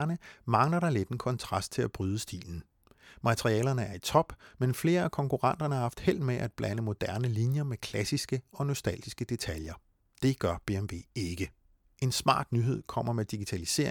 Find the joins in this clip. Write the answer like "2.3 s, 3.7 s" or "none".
none